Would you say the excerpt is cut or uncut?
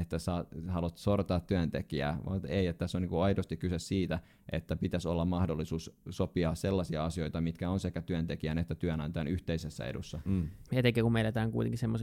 cut